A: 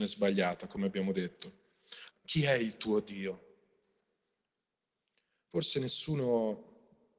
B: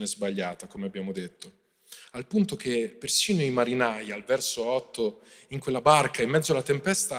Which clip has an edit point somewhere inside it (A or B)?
A